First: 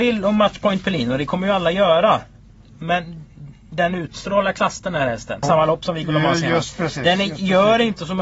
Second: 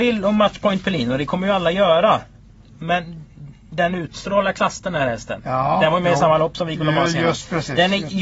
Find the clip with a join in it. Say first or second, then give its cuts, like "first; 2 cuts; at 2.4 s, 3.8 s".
first; 1 cut; at 5.4 s